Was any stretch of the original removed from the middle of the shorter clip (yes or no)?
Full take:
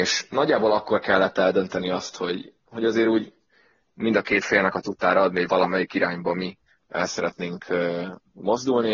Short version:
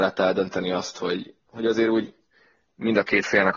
no